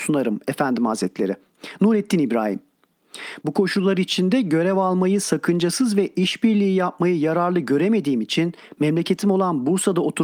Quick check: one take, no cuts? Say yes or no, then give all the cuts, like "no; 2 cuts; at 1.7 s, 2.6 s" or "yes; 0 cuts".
no; 1 cut; at 3.4 s